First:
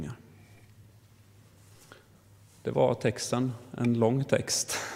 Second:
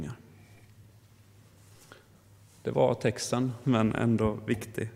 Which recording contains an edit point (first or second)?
second